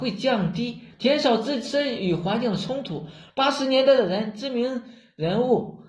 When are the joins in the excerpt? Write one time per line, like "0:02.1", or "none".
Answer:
0:00.9
0:03.3